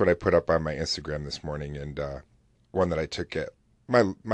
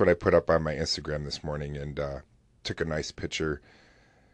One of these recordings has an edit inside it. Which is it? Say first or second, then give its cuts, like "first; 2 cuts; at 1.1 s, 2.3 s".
first; 1 cut; at 2.5 s